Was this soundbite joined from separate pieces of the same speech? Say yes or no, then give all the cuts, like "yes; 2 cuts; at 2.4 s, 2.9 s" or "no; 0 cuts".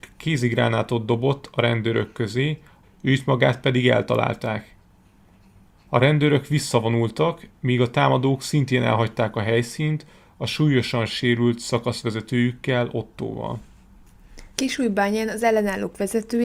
yes; 2 cuts; at 2.8 s, 14.5 s